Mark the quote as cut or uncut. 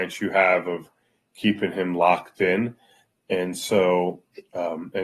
uncut